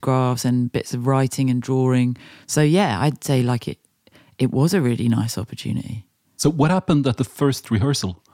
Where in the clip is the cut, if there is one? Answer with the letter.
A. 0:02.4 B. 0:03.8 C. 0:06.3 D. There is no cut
A